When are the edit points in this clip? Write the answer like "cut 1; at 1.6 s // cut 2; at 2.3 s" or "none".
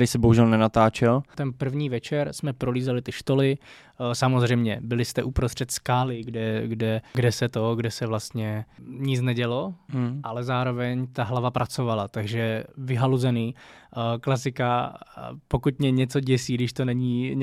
none